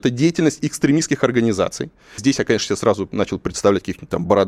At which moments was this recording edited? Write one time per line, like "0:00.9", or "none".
0:02.2